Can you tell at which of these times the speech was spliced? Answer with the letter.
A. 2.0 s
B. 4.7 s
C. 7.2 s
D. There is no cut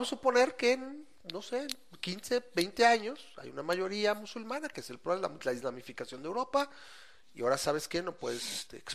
D